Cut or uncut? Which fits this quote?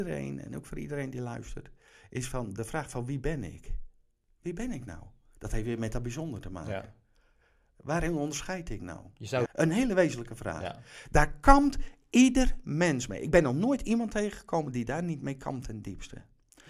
cut